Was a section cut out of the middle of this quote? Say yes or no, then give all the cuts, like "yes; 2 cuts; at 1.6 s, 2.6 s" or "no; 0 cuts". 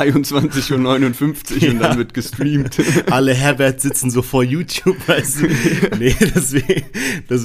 no; 0 cuts